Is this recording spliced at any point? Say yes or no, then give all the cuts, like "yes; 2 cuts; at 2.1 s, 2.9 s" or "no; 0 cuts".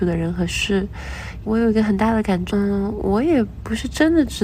yes; 2 cuts; at 1.4 s, 2.5 s